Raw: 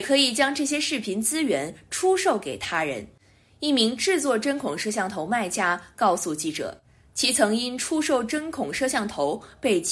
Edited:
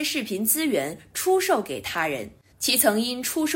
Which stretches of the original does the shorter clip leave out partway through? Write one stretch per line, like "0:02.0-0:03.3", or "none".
0:03.3-0:07.1